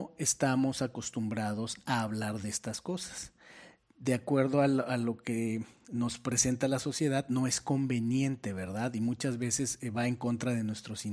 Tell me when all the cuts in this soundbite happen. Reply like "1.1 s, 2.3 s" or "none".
none